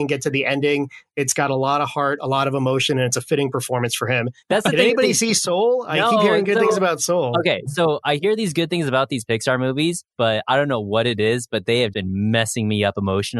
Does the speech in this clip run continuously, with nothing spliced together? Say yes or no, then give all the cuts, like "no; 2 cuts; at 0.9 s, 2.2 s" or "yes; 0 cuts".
no; 2 cuts; at 4.4 s, 11.9 s